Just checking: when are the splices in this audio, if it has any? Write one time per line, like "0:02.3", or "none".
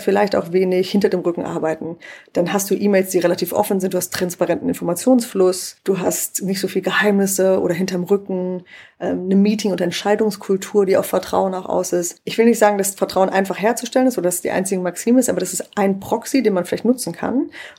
none